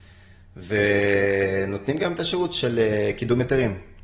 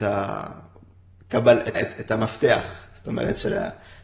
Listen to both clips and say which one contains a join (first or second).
second